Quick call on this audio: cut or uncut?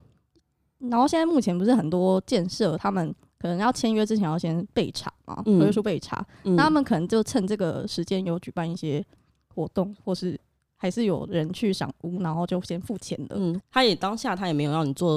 cut